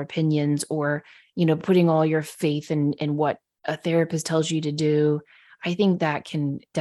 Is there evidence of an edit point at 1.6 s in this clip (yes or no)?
no